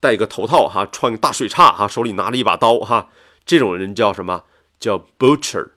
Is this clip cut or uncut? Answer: uncut